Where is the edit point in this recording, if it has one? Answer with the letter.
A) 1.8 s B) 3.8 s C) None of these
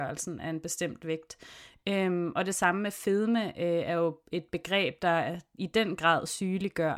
A